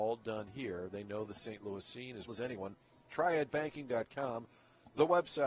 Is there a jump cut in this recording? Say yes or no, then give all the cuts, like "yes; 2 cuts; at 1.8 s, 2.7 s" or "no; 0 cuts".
yes; 1 cut; at 2.3 s